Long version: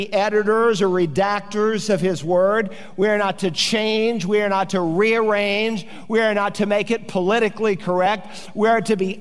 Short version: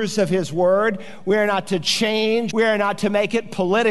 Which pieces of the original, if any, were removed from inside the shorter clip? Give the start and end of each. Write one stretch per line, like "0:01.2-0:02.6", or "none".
0:04.2-0:06.1

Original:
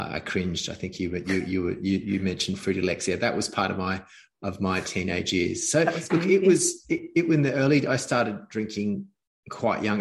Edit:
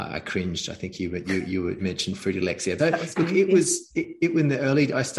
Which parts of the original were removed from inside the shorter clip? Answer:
0:01.8-0:02.2
0:03.2-0:05.7

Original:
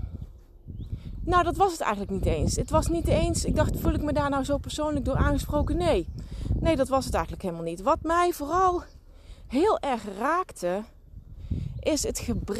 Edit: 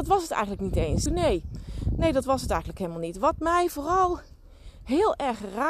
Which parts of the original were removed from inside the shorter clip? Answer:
0:02.6-0:05.7

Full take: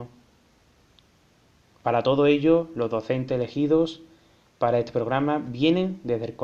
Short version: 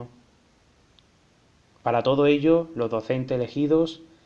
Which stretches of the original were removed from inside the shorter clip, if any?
none

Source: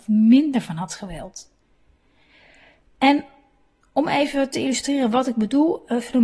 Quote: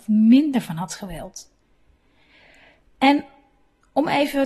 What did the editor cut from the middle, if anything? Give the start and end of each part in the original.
none

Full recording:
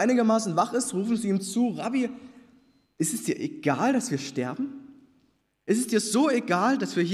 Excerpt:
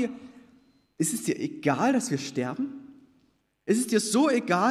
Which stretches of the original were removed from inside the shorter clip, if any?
none

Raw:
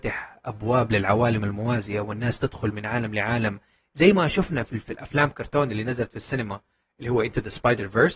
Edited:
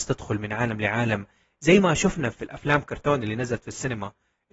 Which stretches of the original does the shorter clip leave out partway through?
0:04.7-0:04.8

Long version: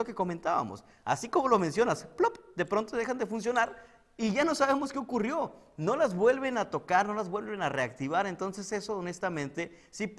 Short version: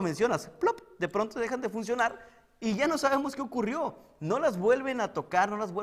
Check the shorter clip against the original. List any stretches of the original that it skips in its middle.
none

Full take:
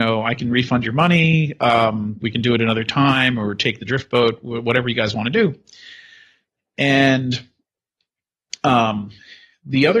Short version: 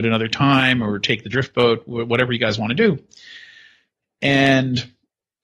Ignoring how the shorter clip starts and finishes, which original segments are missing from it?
none

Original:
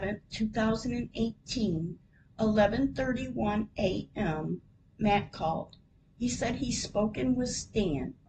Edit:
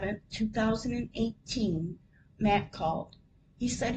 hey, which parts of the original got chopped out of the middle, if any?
0:02.3-0:04.9

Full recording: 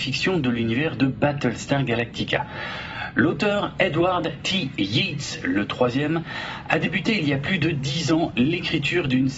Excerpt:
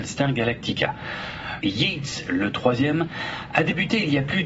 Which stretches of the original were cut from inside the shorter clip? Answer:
0:03.1-0:04.8

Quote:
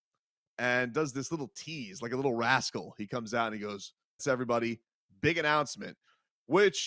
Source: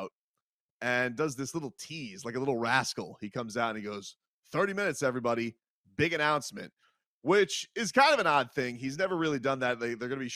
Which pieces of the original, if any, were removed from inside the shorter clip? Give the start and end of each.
0:04.4-0:04.9

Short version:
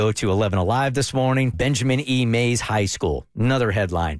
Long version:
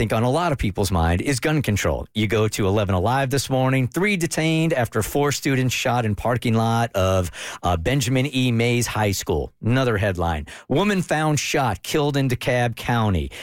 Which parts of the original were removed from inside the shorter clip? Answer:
0:03.9-0:07.8

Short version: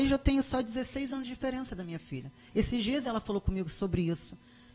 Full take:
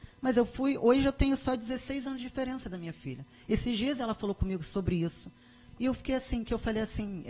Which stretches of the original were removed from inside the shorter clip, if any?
none

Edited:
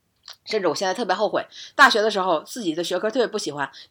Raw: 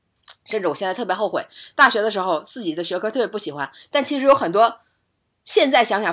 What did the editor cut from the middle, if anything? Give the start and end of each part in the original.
none

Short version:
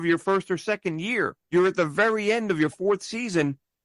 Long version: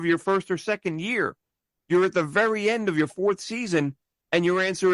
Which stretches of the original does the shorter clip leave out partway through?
0:01.4-0:01.8

